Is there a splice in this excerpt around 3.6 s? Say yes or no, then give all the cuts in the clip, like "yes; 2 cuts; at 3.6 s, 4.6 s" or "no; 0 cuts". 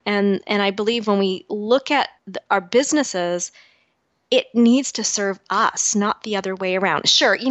no; 1 cut; at 2.2 s